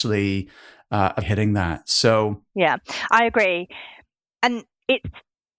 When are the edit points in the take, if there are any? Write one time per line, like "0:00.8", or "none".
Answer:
0:01.2